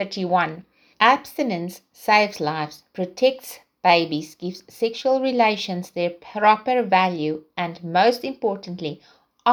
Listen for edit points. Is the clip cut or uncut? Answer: cut